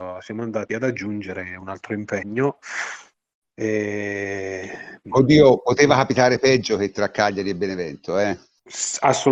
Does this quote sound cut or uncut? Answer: uncut